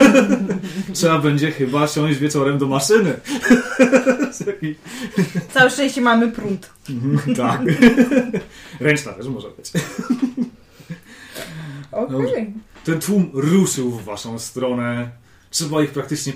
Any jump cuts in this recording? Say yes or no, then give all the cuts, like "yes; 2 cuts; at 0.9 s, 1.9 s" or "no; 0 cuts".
no; 0 cuts